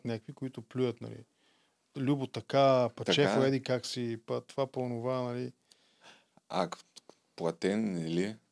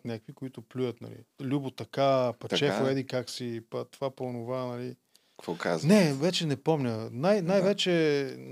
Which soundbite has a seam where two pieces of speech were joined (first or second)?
second